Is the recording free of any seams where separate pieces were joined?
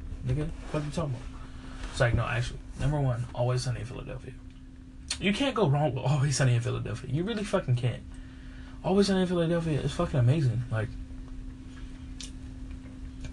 yes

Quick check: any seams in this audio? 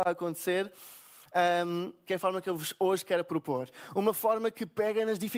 yes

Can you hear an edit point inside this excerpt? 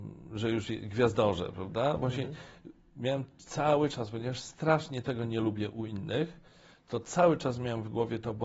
no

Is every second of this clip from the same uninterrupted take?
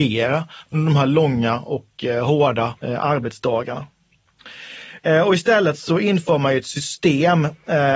no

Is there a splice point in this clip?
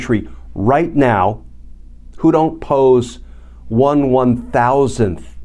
no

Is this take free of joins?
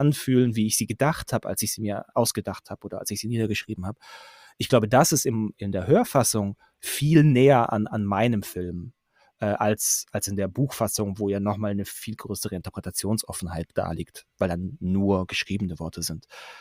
no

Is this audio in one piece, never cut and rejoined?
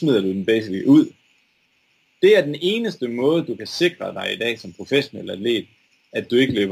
yes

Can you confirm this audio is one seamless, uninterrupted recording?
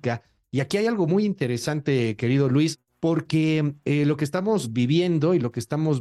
yes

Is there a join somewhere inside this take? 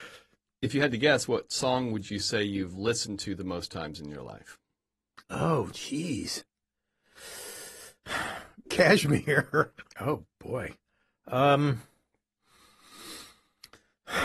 yes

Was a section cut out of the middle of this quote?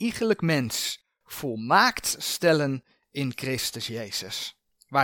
no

